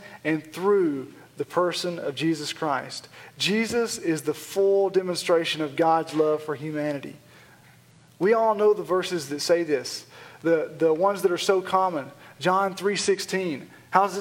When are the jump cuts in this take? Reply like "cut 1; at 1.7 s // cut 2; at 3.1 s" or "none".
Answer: none